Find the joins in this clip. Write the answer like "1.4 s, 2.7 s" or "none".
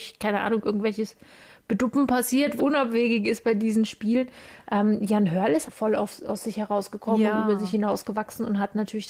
2.6 s, 5.7 s

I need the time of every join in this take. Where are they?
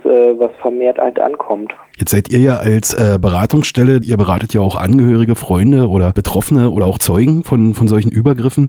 4.0 s

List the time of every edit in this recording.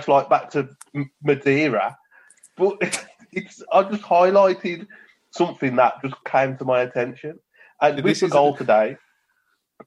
none

